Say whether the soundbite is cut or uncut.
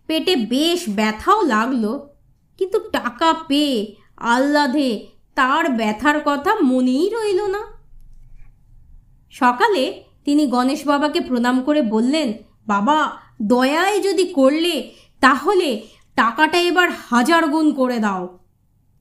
uncut